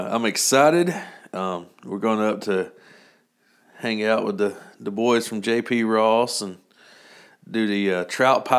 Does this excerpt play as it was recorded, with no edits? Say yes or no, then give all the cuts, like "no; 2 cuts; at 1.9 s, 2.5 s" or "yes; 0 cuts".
yes; 0 cuts